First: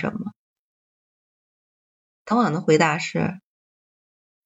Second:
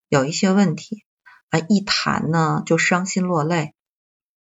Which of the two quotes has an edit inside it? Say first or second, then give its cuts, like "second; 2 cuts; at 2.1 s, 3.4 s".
first; 1 cut; at 2.3 s